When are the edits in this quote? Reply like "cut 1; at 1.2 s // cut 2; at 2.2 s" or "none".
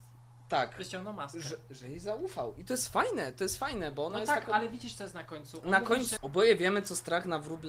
cut 1; at 6.2 s

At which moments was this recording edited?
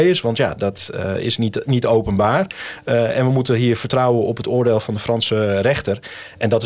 none

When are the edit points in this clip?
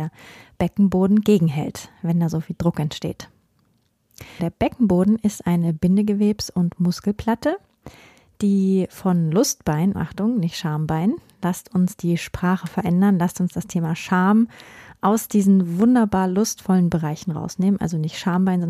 cut 1; at 4.4 s // cut 2; at 9.9 s

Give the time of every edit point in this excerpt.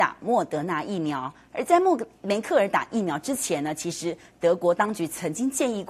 cut 1; at 2.1 s

